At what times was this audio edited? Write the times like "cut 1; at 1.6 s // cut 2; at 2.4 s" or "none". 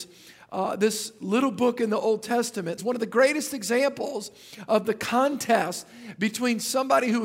cut 1; at 2.8 s